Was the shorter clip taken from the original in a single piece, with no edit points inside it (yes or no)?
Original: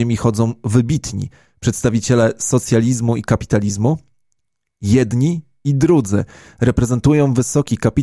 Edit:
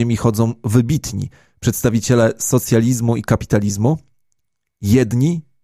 yes